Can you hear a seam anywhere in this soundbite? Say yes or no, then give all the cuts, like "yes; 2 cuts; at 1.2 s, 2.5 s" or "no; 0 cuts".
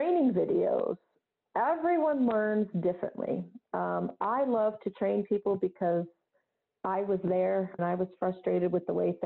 yes; 1 cut; at 7.8 s